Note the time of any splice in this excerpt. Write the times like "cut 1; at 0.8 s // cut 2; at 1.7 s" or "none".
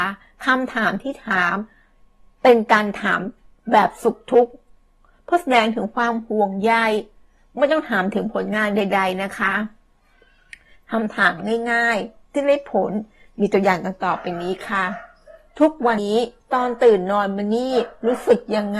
cut 1; at 16.0 s